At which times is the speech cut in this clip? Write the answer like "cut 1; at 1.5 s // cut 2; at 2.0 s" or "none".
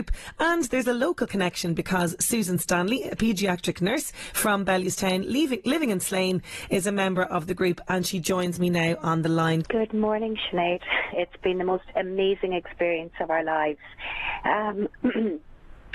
cut 1; at 9.6 s // cut 2; at 11.1 s